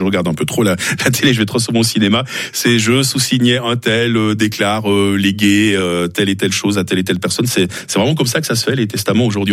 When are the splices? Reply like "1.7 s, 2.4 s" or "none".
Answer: none